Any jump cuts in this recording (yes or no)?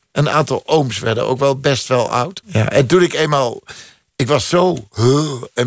yes